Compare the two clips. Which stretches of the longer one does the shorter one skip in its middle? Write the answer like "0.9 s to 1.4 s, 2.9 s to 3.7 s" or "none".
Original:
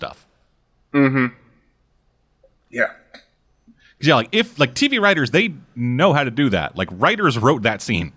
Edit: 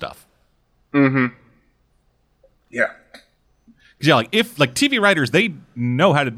none